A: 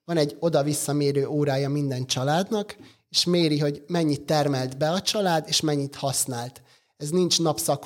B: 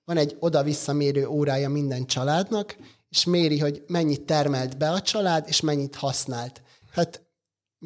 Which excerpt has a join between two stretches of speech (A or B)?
B